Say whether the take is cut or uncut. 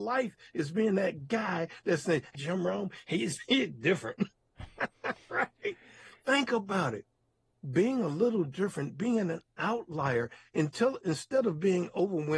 cut